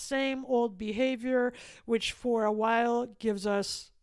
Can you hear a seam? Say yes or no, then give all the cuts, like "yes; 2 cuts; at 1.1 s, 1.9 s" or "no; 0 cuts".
no; 0 cuts